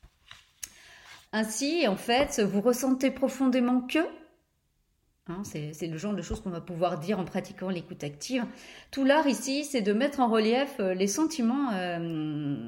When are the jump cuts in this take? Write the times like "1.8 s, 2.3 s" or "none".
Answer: 1.2 s